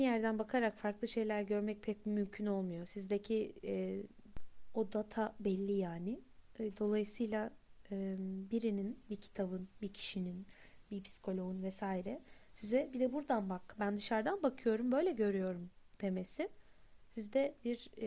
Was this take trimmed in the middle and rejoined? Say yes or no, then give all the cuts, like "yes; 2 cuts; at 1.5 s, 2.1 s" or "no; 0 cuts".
no; 0 cuts